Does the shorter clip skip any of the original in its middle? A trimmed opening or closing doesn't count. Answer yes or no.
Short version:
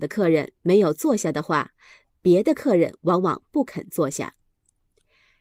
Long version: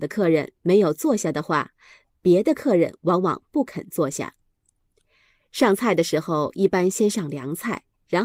no